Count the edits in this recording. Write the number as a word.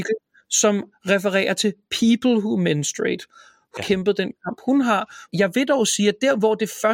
two